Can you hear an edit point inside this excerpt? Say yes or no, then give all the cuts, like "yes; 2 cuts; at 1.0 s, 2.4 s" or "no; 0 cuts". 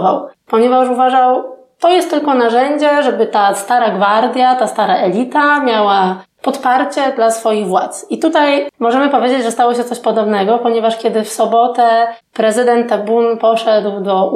no; 0 cuts